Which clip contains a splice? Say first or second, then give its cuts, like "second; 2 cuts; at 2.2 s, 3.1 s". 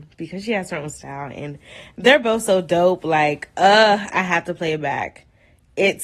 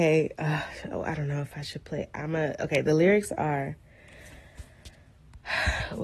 first; 1 cut; at 4.1 s